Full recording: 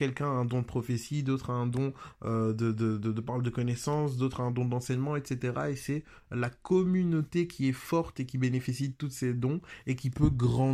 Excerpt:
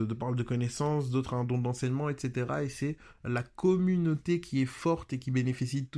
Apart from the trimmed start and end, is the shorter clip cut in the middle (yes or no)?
no